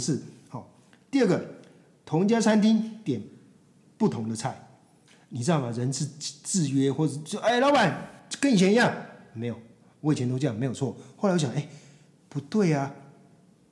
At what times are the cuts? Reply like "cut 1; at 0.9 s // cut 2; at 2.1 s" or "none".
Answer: none